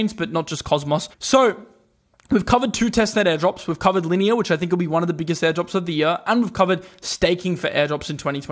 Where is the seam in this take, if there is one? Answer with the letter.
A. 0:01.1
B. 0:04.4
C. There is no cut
A